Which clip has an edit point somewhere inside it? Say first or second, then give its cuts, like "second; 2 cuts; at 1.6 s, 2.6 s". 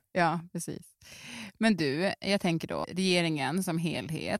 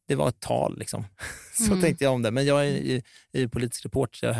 first; 1 cut; at 2.8 s